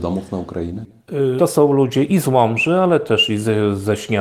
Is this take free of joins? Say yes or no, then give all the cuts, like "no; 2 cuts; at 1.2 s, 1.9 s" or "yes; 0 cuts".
no; 1 cut; at 1.4 s